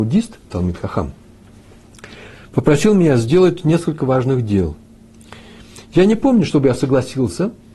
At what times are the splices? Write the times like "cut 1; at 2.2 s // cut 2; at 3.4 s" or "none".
none